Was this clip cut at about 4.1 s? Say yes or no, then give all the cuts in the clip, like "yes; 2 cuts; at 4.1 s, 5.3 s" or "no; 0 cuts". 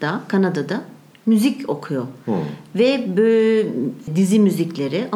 yes; 1 cut; at 4.1 s